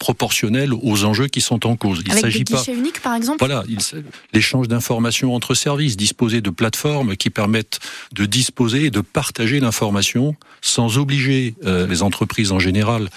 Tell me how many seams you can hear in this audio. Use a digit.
2